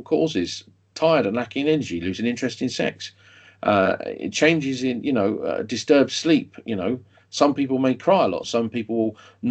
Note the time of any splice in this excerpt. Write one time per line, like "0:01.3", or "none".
0:08.4